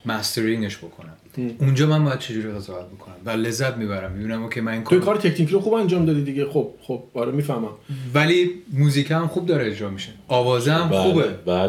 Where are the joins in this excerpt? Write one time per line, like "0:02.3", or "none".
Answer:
none